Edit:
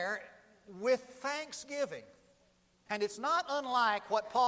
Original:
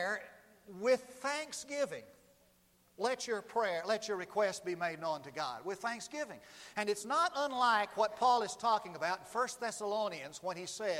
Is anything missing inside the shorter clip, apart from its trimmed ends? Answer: yes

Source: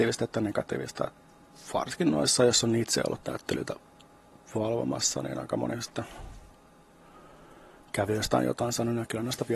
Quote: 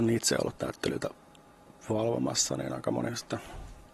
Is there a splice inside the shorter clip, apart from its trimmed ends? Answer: no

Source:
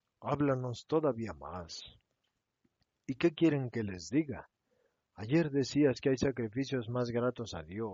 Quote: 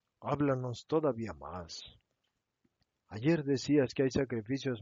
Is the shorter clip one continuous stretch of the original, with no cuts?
no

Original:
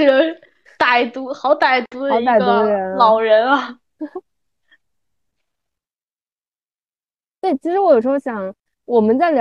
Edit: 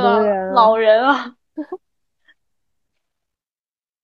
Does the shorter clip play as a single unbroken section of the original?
yes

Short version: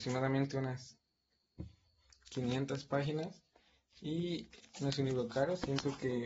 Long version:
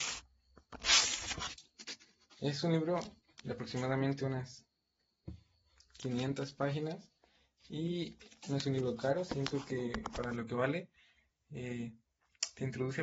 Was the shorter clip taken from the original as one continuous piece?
yes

